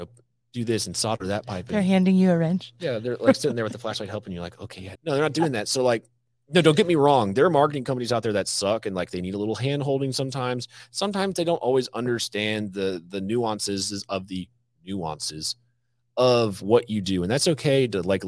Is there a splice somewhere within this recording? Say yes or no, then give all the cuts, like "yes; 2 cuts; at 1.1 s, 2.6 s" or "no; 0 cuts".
yes; 1 cut; at 5.0 s